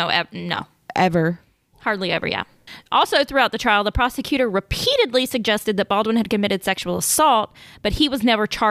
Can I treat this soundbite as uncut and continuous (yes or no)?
yes